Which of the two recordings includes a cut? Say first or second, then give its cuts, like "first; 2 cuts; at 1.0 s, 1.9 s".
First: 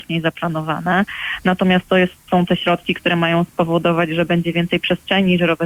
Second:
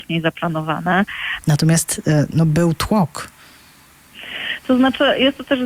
second; 1 cut; at 1.4 s